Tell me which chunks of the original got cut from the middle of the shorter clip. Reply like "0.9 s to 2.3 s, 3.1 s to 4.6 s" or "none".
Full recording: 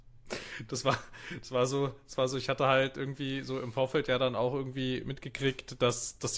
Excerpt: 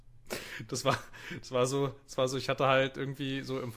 none